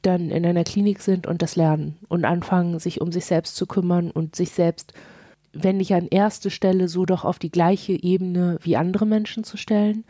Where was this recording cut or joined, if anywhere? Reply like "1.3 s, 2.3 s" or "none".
none